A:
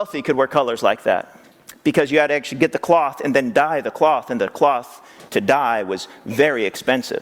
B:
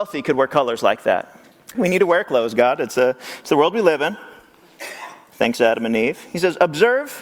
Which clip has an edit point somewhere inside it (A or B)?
B